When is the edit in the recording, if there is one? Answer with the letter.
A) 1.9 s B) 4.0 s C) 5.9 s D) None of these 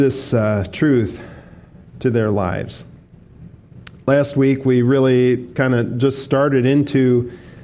D